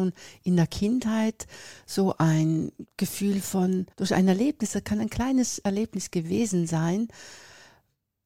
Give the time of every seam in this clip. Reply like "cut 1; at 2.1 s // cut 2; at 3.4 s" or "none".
cut 1; at 3.9 s